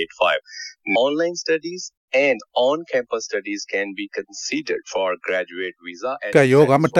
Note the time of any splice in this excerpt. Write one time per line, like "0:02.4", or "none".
0:01.0